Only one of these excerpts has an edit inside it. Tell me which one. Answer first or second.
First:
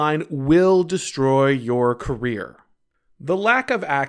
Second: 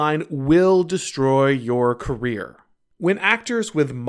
second